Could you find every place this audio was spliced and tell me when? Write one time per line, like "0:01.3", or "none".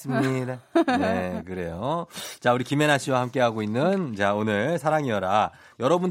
none